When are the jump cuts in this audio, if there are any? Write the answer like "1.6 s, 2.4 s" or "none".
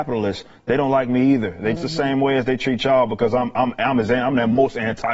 1.8 s